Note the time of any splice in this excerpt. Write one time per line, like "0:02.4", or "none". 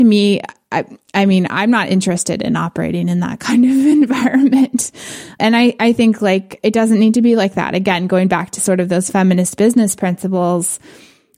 none